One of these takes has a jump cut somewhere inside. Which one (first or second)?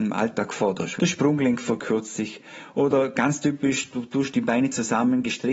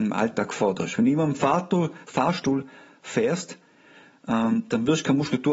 first